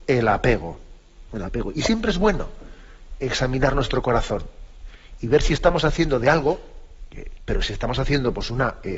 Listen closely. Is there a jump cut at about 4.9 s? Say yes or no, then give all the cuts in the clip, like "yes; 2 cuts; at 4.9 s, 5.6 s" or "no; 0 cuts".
no; 2 cuts; at 1.3 s, 7.4 s